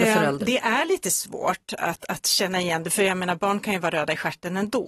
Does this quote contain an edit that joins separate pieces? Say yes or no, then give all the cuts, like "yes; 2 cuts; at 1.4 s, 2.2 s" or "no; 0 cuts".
no; 0 cuts